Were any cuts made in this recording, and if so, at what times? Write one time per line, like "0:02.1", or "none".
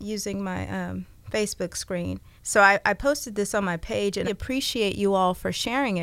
0:02.4
0:04.3